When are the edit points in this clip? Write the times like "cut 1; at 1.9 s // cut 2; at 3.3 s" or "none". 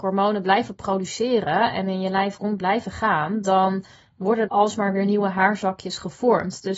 cut 1; at 4.5 s